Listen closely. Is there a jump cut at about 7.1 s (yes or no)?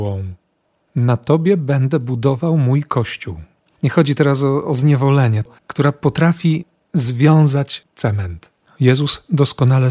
no